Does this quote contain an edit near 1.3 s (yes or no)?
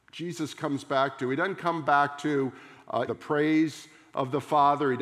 no